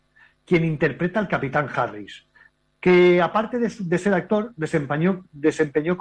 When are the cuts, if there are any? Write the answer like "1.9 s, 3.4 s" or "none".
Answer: none